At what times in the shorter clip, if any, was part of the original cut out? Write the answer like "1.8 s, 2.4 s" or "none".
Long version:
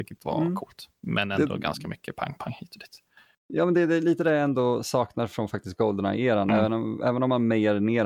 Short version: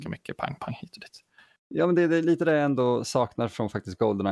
none

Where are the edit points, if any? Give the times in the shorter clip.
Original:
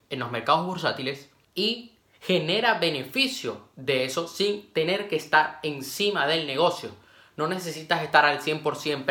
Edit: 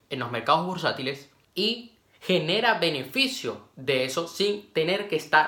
none

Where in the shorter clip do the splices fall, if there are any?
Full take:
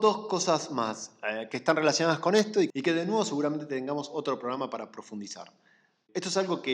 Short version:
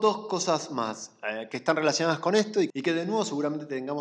none

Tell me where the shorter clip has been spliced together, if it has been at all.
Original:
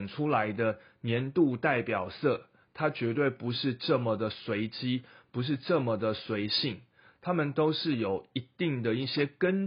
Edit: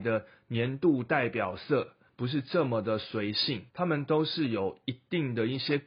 2.1 s, 3.7 s

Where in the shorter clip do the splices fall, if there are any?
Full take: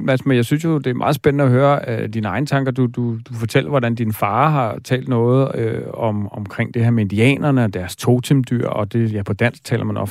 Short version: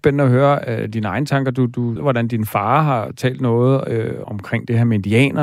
2.0 s, 4.2 s

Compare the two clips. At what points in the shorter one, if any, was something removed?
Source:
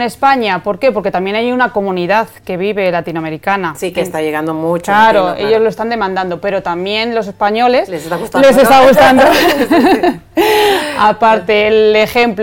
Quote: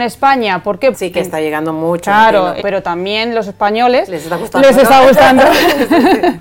0.9 s, 2.6 s

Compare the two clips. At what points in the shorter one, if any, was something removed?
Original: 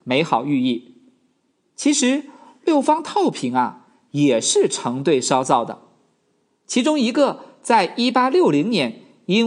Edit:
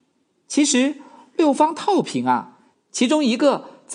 2.7 s

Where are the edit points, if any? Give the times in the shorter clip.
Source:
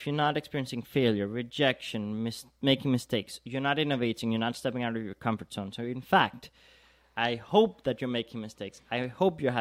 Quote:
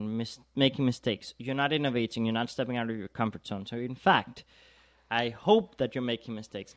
none

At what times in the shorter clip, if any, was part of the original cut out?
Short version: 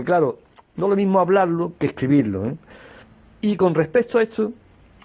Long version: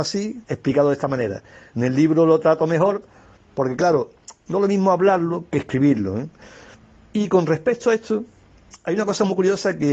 none

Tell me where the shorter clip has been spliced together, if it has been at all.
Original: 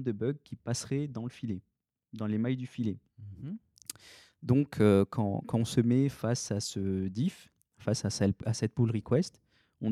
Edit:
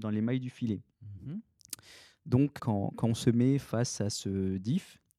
2.6 s

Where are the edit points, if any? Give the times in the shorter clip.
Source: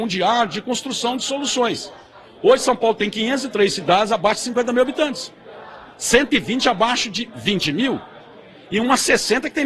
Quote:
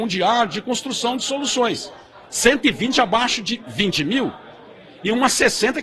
2.2 s

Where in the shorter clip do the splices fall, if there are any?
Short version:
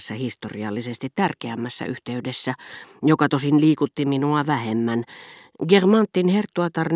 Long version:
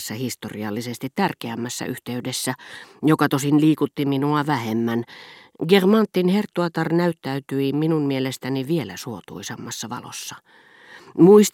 none

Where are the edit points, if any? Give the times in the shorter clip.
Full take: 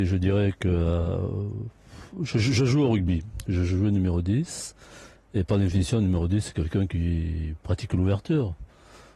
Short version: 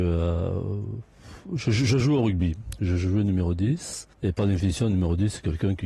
4.1 s

